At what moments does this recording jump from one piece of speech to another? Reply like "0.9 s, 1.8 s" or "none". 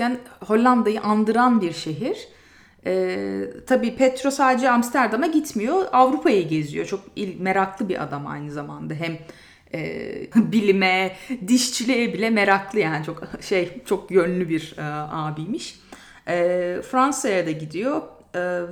10.3 s

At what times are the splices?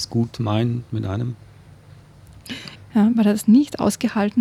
2.8 s

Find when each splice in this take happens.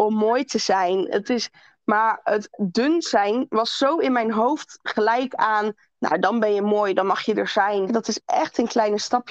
7.9 s

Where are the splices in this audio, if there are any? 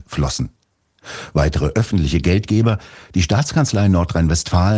none

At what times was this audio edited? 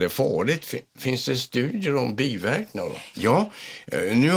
3.1 s

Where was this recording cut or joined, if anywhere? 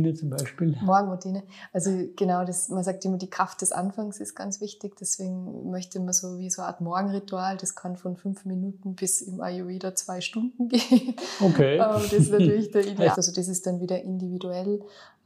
13.1 s

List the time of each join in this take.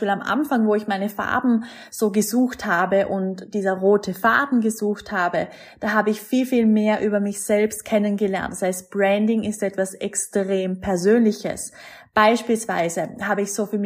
none

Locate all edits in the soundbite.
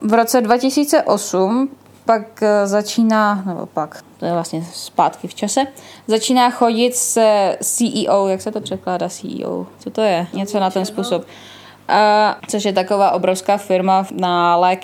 10.3 s, 12.4 s

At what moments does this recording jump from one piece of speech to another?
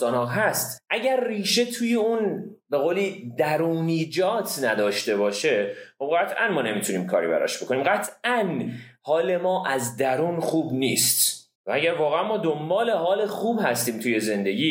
11.5 s

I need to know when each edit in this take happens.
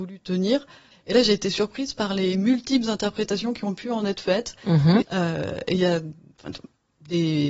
0.9 s, 5.0 s

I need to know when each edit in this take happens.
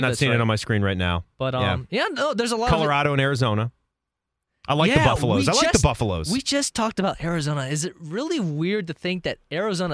none

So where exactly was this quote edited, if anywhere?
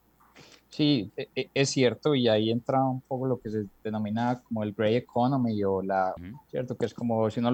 1.1 s, 6.2 s

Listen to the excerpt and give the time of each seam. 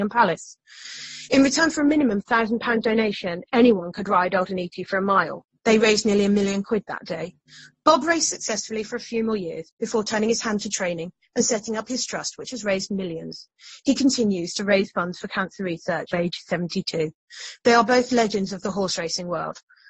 16.1 s, 17.6 s

